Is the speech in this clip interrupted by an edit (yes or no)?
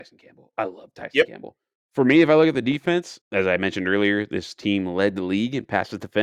yes